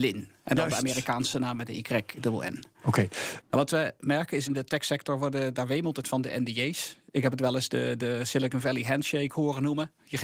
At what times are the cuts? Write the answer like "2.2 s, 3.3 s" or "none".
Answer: 3.4 s, 4.5 s